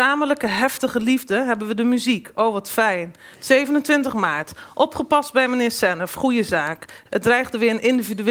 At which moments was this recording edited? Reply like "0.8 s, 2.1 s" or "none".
3.3 s, 7.1 s